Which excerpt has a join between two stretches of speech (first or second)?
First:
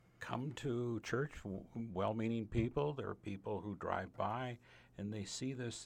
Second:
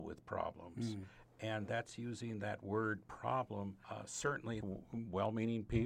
second